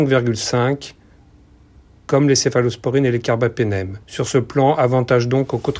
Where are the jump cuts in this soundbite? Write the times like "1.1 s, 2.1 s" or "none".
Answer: 4.0 s